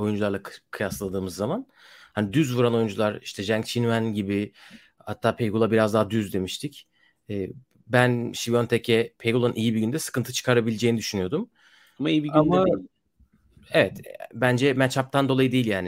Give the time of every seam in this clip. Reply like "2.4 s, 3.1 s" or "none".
none